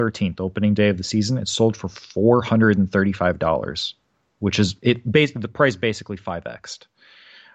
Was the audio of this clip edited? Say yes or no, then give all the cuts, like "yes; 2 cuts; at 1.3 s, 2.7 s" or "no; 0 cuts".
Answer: no; 0 cuts